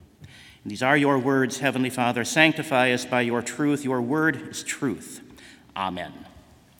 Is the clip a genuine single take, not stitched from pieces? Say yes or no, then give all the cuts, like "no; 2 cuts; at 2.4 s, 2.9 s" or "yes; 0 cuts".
yes; 0 cuts